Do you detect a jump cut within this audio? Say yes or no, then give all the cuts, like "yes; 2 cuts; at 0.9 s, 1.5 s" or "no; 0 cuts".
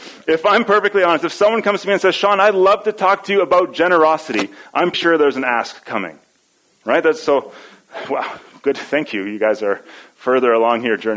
yes; 1 cut; at 4.9 s